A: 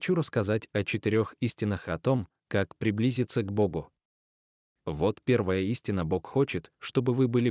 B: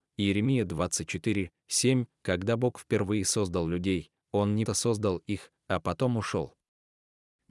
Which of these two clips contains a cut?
B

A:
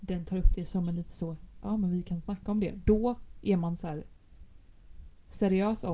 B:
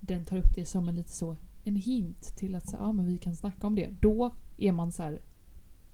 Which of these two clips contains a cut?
A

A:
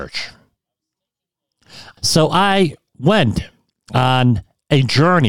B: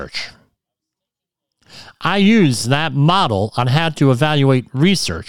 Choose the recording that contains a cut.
A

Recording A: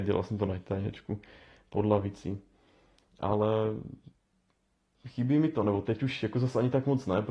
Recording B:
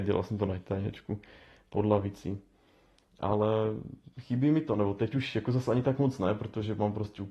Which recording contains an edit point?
B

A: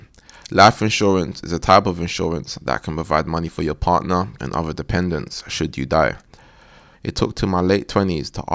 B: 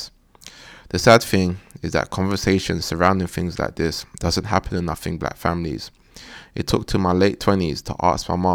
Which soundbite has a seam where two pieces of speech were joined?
A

